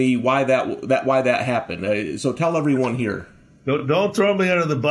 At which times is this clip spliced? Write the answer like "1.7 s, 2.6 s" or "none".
none